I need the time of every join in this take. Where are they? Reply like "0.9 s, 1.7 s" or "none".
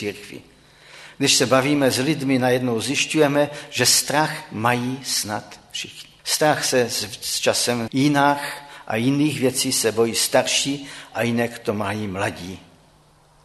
6.2 s, 7.9 s

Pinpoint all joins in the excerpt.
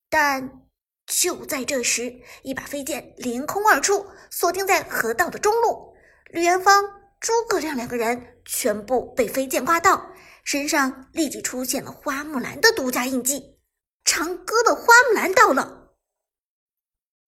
14.0 s

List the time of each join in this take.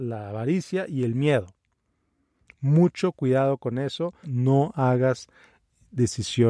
4.2 s

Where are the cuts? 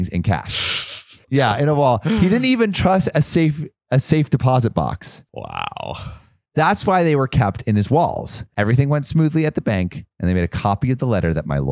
1.2 s, 8.5 s

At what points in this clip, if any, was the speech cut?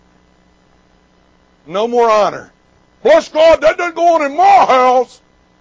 none

